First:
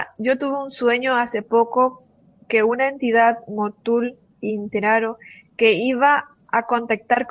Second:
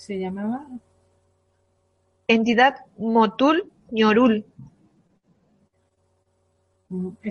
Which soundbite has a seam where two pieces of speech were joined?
first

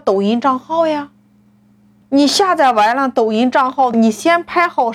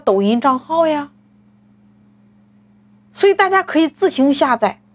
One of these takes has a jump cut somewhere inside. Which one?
first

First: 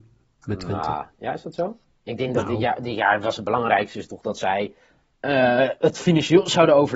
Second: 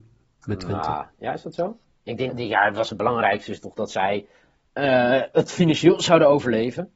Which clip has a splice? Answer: second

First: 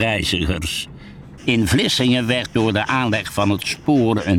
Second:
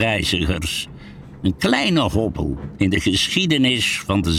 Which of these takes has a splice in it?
first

